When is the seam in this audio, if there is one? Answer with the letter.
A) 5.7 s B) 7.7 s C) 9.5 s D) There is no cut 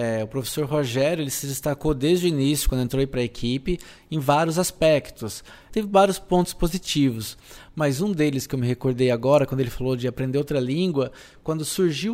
A